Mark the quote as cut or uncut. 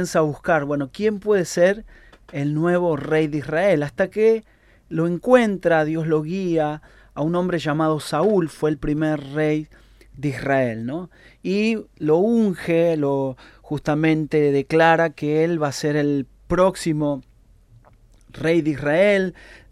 uncut